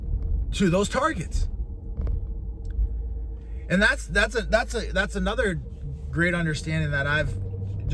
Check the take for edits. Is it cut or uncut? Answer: uncut